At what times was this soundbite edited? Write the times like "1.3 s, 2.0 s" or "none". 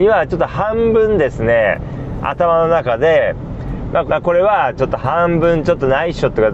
4.1 s